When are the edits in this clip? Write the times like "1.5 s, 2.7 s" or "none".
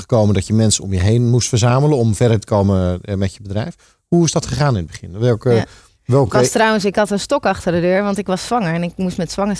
none